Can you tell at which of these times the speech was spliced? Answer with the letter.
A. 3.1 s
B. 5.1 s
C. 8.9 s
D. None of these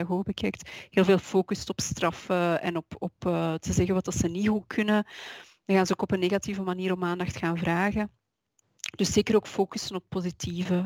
D